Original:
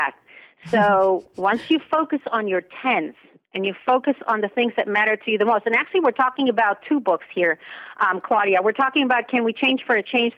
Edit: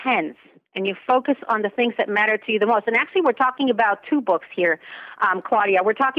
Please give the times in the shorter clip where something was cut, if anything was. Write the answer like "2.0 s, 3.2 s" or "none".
none